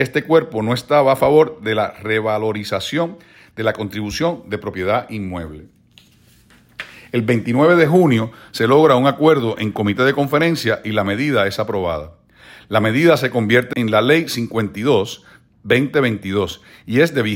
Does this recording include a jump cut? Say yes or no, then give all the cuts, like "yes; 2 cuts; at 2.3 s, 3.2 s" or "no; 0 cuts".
yes; 1 cut; at 13.7 s